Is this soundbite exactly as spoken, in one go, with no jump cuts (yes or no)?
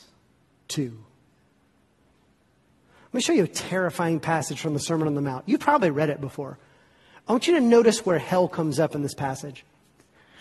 yes